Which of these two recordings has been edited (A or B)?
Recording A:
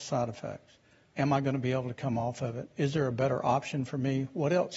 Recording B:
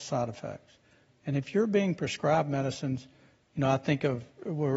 A